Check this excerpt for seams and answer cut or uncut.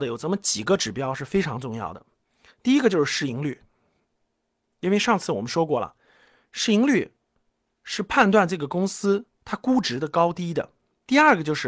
uncut